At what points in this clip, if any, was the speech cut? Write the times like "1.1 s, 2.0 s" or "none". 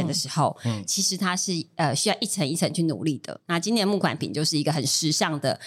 3.4 s